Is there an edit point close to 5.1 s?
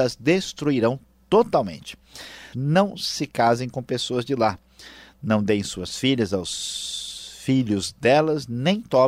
no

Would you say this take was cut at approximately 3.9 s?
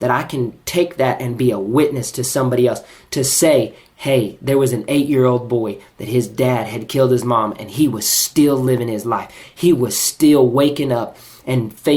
no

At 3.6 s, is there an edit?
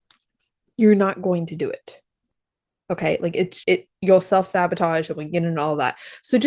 yes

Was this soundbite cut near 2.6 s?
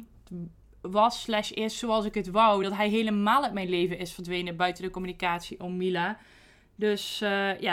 no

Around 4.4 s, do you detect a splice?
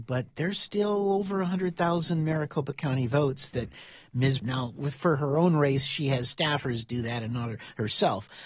yes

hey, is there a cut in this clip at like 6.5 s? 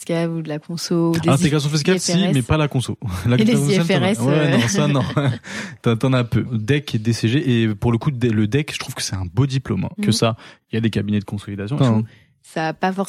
yes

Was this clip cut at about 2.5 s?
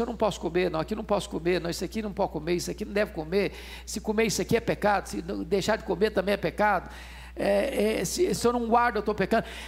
no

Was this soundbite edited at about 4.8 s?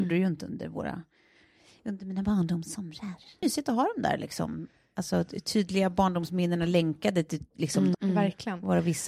no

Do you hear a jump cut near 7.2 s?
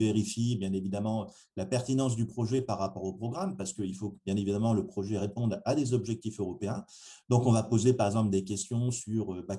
no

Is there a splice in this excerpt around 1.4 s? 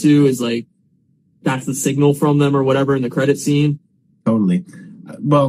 no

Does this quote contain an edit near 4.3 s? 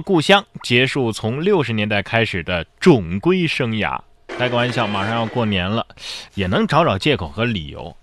yes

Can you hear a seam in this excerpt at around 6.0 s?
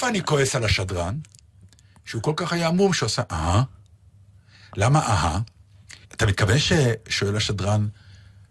yes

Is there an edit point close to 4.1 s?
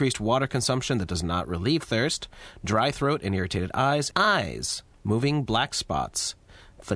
yes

